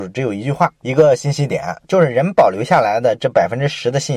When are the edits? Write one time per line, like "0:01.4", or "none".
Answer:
0:01.8